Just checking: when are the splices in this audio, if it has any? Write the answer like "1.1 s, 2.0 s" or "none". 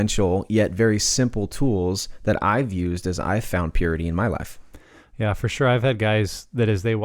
none